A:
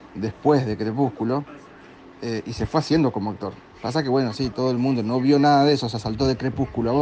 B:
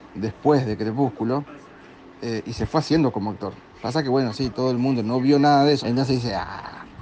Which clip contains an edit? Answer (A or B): B